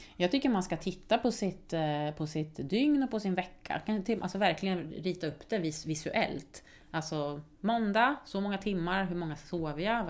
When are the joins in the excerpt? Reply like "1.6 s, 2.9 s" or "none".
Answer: none